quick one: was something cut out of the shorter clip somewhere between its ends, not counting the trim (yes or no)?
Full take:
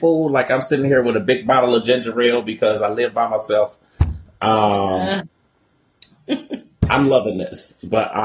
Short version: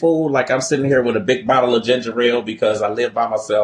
no